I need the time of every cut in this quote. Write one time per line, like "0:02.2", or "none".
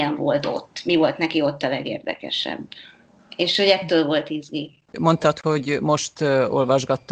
0:04.9